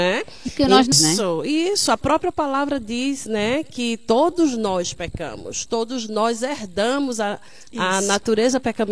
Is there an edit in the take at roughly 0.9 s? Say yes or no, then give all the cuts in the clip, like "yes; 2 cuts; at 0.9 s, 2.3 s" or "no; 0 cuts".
yes; 1 cut; at 0.9 s